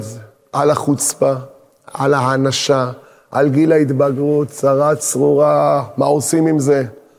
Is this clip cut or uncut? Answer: uncut